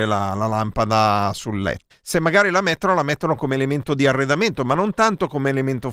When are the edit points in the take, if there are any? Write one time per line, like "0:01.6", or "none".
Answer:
0:01.9

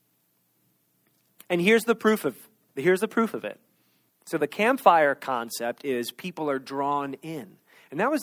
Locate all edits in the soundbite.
0:04.1

